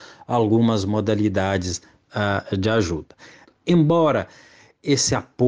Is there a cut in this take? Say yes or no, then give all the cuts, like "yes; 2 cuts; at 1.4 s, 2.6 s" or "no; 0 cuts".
yes; 1 cut; at 3.5 s